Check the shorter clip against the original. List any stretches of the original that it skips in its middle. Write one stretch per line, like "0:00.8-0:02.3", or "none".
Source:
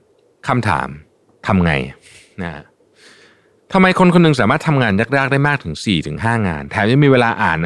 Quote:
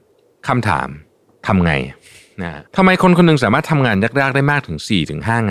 0:02.7-0:03.6